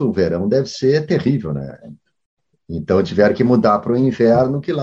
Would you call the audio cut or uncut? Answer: cut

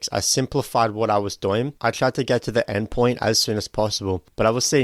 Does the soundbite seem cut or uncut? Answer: cut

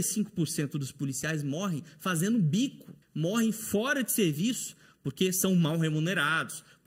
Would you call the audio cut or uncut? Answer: cut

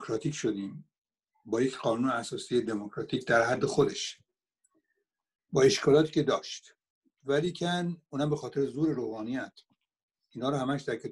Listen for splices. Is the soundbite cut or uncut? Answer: uncut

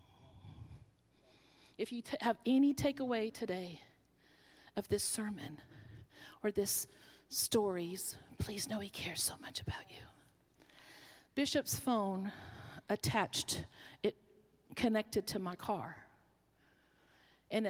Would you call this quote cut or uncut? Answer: uncut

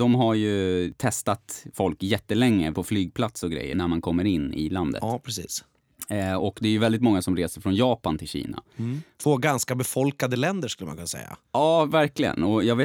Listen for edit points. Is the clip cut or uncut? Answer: uncut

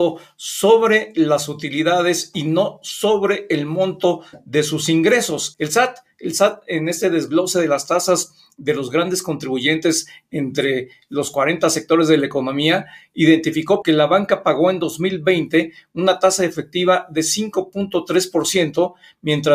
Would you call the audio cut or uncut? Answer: cut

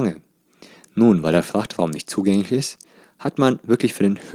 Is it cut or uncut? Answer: uncut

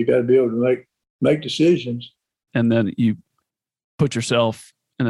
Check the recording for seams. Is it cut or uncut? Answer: cut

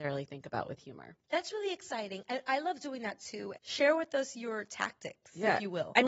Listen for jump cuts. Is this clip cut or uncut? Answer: cut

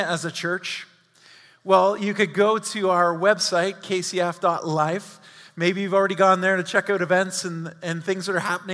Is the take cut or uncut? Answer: uncut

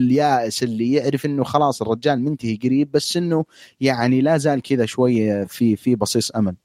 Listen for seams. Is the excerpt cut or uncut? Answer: uncut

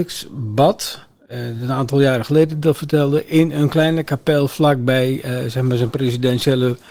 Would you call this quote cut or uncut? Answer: uncut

